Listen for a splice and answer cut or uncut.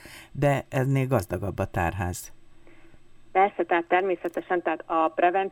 uncut